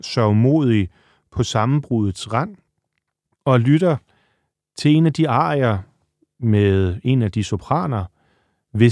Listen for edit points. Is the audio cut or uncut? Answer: uncut